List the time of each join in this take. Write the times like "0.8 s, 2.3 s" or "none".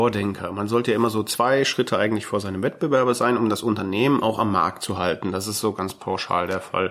none